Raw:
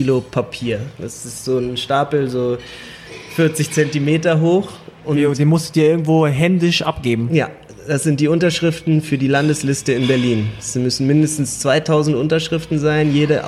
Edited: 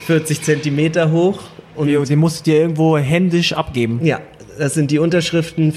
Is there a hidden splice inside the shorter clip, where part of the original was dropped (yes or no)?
no